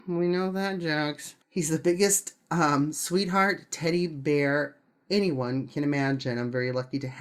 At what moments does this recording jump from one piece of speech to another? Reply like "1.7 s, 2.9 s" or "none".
1.4 s